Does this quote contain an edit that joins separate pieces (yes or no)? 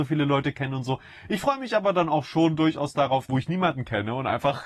yes